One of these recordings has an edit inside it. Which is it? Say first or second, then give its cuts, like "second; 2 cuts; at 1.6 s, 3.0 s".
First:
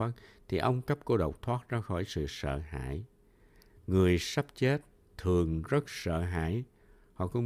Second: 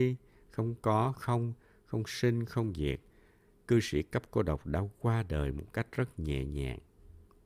second; 1 cut; at 1.2 s